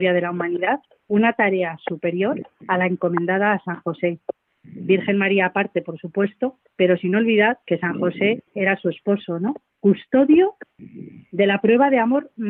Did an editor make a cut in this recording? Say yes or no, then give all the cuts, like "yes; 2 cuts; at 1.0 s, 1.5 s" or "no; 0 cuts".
no; 0 cuts